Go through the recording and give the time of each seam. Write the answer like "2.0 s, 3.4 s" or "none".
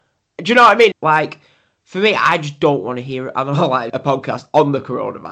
0.9 s, 3.9 s